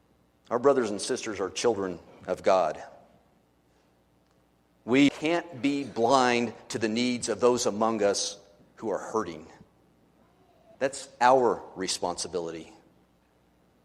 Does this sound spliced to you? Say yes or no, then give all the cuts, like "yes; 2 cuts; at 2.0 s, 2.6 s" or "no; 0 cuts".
yes; 2 cuts; at 5.1 s, 10.7 s